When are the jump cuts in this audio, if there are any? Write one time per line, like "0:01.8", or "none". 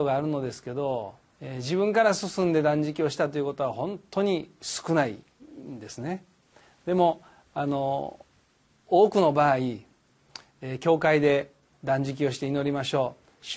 0:01.3

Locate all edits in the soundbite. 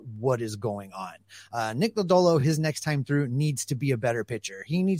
none

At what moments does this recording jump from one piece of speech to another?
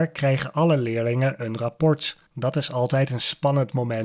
0:02.3

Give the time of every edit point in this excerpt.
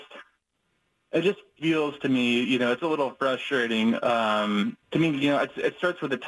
0:04.8

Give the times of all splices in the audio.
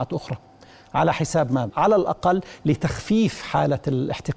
0:01.7

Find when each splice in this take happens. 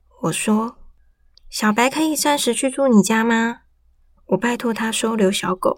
0:01.3

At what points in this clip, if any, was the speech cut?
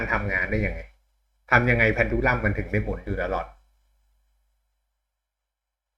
none

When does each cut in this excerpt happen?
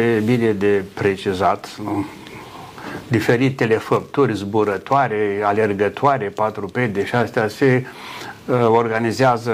none

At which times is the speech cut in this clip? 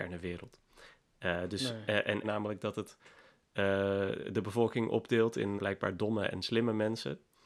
0:02.2
0:05.6

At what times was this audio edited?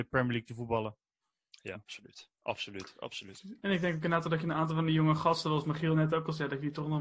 0:01.7

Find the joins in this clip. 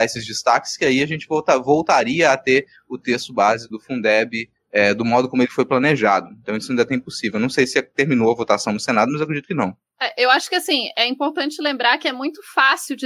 0:03.7

